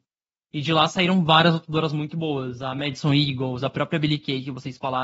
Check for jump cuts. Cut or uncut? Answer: uncut